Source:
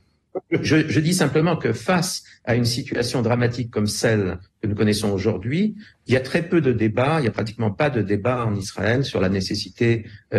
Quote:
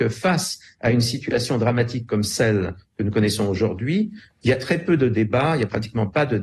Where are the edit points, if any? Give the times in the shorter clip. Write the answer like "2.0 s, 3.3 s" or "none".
none